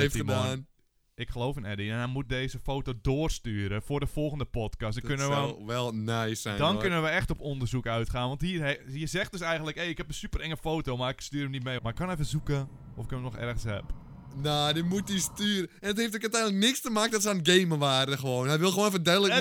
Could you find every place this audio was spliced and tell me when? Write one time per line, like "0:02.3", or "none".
0:11.8